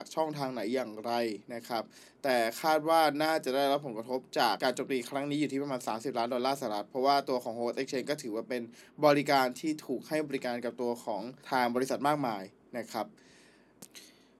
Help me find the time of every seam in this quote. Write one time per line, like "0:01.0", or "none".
0:04.6
0:11.4